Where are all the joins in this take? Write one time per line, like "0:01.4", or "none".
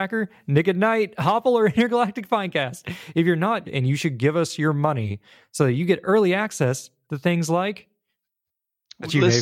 0:03.6